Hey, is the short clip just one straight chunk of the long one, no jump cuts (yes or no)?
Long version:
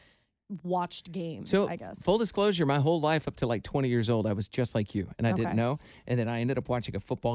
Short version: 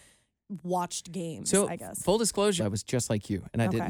no